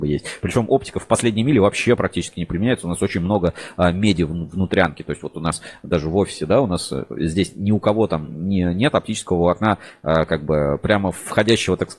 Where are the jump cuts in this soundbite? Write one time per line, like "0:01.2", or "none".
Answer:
none